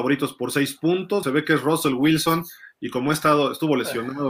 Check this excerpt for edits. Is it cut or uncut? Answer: cut